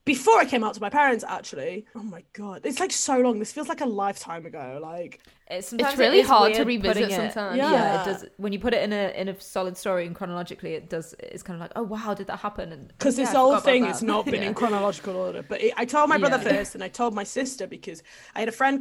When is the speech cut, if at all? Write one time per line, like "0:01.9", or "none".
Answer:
none